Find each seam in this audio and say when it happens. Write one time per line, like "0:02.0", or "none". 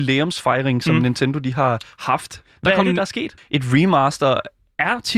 0:03.4